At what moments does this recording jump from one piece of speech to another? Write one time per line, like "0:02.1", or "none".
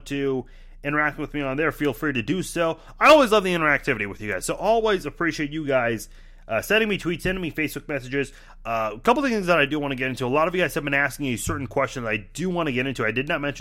none